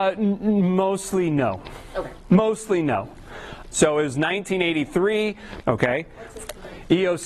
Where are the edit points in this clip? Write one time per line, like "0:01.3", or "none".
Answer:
0:03.7
0:05.6